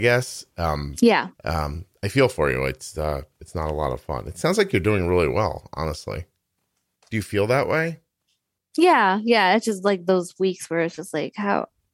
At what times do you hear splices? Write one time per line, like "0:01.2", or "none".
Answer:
0:01.4